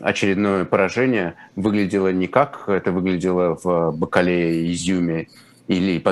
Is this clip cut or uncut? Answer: uncut